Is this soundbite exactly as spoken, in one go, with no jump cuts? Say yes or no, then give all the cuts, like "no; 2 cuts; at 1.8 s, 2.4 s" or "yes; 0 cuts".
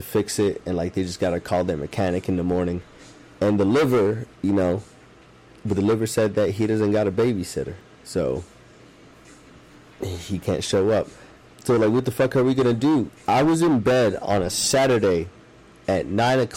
no; 2 cuts; at 11.5 s, 13.1 s